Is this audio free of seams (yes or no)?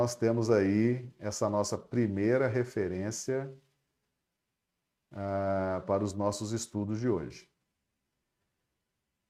yes